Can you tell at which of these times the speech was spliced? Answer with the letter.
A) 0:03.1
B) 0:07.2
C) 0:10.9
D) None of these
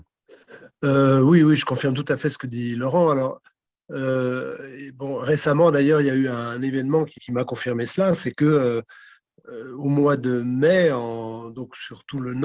B